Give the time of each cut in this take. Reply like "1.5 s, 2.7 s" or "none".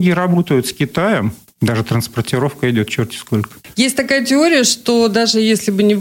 1.5 s